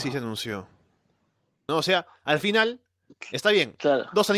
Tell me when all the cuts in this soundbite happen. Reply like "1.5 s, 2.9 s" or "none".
1.7 s